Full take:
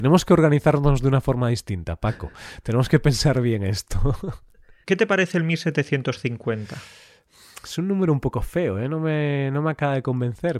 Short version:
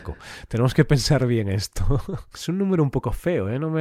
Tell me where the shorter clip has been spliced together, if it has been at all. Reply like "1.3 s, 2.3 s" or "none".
2.3 s